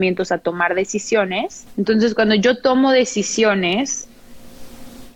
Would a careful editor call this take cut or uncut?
uncut